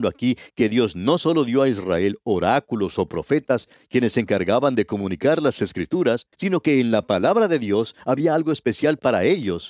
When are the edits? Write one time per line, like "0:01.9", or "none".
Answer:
0:06.3